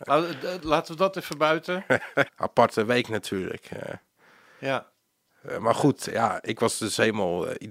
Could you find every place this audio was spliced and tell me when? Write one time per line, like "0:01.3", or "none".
0:02.3